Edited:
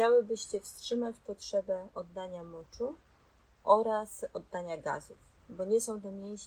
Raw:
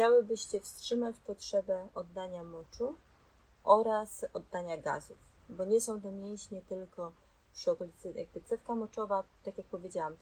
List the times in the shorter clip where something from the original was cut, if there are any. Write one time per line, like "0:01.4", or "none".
none